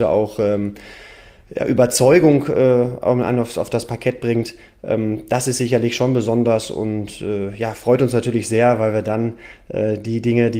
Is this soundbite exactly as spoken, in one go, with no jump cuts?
yes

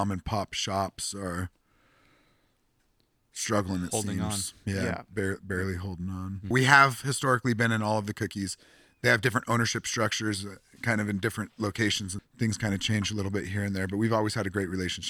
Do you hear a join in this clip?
yes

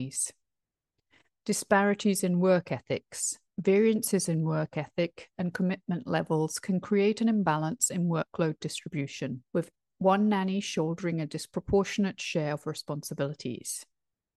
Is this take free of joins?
no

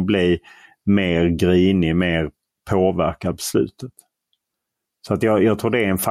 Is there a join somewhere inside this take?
no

